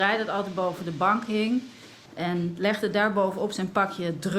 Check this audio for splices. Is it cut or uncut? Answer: cut